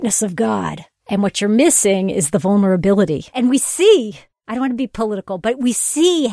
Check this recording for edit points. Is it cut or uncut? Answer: cut